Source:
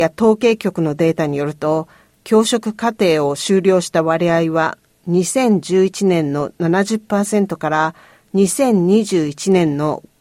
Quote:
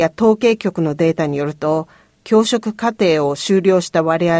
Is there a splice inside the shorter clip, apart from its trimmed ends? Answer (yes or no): no